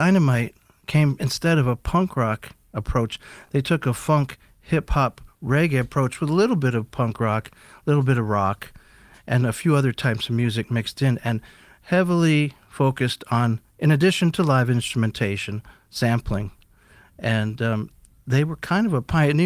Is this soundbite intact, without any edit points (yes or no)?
yes